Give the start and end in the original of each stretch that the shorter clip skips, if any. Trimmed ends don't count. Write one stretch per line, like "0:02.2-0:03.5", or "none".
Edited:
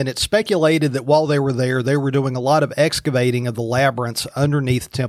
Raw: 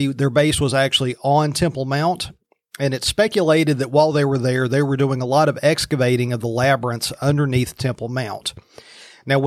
none